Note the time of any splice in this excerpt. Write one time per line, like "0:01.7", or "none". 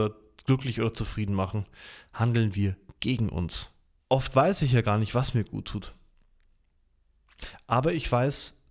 0:04.0